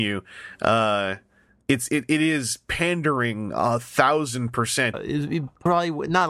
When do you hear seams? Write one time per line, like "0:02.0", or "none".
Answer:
0:04.9